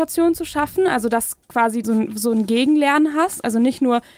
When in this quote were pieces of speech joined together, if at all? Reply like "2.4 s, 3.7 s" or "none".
1.8 s